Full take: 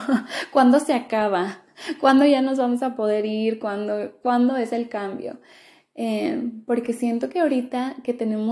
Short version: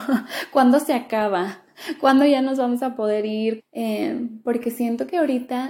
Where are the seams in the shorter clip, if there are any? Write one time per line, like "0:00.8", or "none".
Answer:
0:03.6